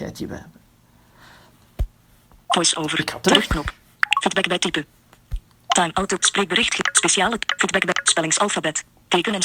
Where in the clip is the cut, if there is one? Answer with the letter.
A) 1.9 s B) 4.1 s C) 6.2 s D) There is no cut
C